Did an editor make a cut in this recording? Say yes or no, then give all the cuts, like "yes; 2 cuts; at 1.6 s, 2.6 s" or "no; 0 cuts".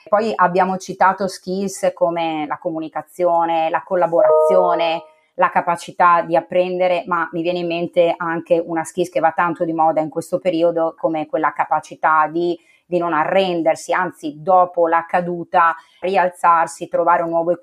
yes; 2 cuts; at 11.0 s, 16.0 s